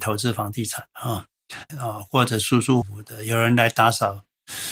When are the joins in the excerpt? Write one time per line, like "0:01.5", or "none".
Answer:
0:01.7
0:02.8